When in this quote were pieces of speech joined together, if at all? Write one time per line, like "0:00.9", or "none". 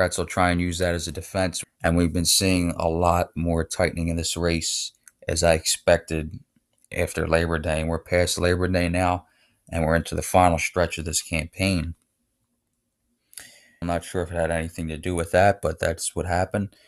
0:01.6
0:13.8